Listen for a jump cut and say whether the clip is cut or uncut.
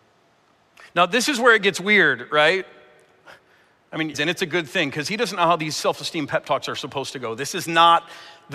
cut